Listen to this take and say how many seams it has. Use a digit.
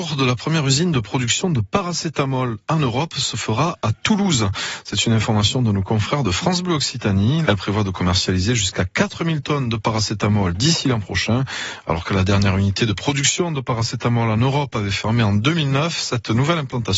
1